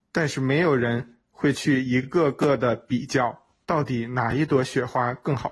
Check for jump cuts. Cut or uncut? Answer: uncut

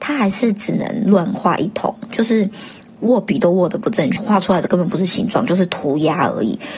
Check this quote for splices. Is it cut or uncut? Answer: cut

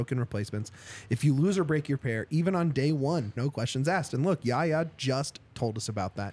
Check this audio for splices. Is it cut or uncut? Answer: cut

